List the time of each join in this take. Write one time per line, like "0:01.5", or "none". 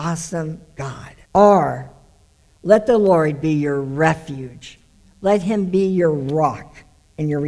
0:01.2